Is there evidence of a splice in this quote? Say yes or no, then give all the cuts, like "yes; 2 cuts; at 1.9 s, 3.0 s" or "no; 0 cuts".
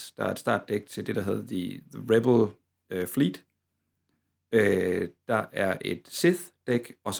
no; 0 cuts